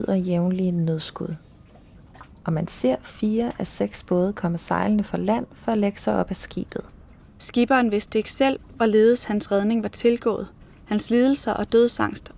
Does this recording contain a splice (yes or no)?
yes